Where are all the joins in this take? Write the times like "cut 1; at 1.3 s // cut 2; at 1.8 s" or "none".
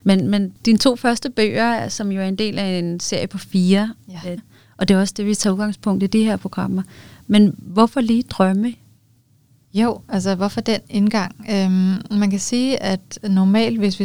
cut 1; at 4.4 s